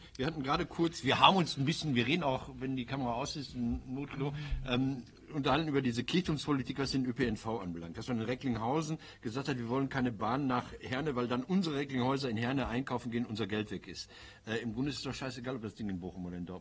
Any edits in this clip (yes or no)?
no